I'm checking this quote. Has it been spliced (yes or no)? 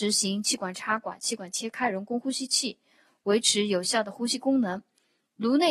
no